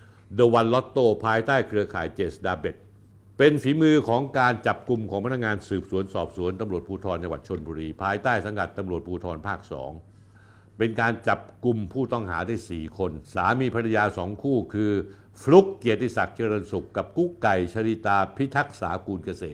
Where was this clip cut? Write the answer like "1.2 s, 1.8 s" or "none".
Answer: 13.2 s